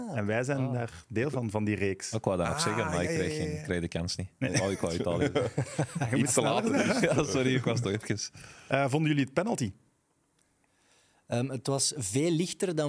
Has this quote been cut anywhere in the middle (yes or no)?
no